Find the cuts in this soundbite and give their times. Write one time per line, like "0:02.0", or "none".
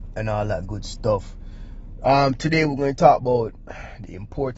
none